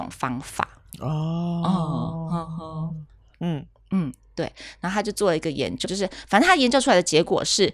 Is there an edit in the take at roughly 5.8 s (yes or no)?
yes